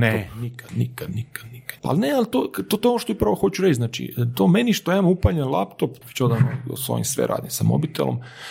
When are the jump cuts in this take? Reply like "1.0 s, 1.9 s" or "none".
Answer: 1.8 s, 6.0 s